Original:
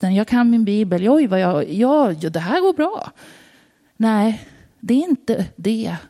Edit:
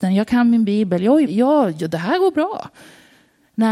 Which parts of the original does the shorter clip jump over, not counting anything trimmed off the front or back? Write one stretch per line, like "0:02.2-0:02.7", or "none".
0:01.2-0:01.7